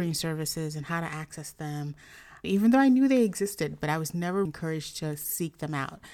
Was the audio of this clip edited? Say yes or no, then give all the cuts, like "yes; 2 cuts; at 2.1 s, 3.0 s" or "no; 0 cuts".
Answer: yes; 2 cuts; at 2.4 s, 4.5 s